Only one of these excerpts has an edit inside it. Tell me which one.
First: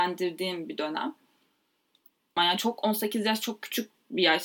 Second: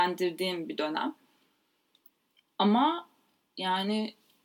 first; 1 cut; at 2.4 s

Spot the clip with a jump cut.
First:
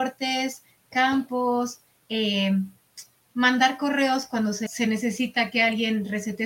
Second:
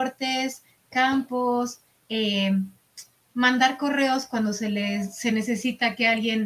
first; 1 cut; at 4.7 s

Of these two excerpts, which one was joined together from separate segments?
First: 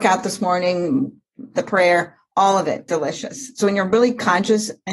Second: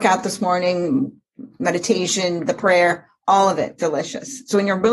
first; 1 cut; at 1.5 s

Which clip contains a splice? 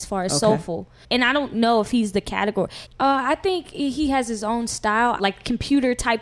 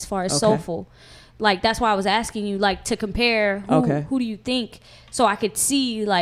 first; 3 cuts; at 1.0 s, 2.9 s, 5.2 s

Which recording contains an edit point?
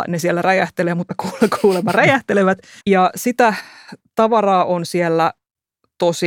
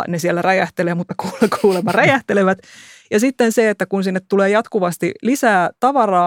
first; 1 cut; at 2.8 s

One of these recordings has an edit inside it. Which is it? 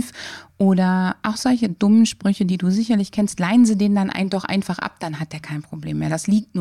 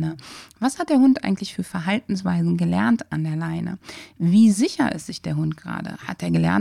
first; 1 cut; at 1.2 s

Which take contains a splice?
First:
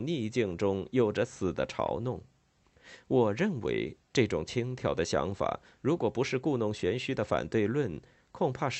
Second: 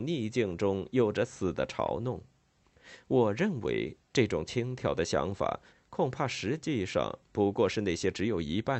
second; 1 cut; at 5.7 s

